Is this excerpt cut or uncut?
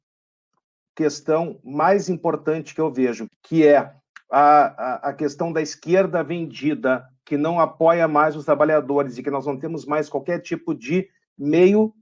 cut